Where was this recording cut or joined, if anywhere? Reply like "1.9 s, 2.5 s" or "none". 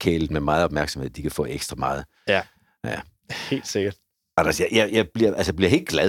none